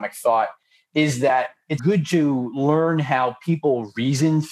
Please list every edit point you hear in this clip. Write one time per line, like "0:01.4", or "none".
0:01.8